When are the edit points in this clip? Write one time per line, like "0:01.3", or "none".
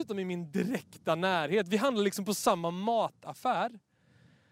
none